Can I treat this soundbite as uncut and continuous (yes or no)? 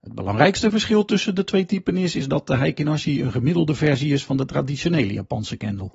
yes